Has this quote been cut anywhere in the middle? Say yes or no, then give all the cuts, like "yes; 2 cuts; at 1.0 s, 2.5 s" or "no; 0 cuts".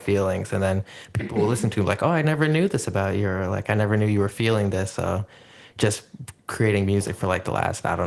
no; 0 cuts